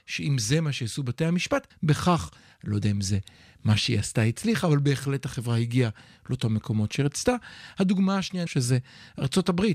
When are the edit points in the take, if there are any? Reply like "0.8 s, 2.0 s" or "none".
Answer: 1.7 s, 8.5 s